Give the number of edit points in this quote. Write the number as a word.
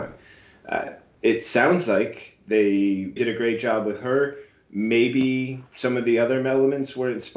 one